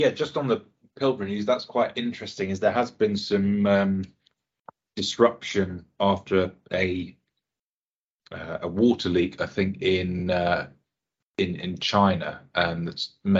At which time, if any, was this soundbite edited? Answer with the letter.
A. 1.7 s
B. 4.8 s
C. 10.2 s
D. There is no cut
D